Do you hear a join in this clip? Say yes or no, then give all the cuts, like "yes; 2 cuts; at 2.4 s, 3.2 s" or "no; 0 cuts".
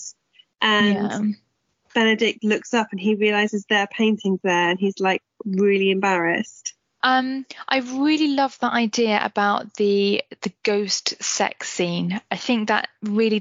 yes; 1 cut; at 7.0 s